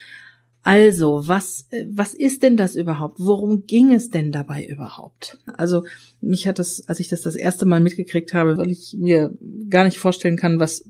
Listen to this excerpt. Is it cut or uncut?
cut